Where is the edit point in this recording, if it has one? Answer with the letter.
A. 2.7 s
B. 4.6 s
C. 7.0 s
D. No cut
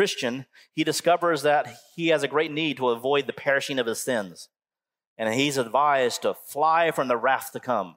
D